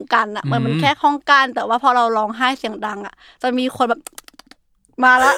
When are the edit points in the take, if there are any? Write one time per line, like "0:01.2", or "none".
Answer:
none